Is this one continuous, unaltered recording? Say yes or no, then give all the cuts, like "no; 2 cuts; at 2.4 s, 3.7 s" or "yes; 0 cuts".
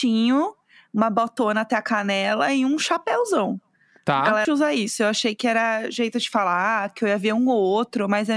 no; 1 cut; at 4.4 s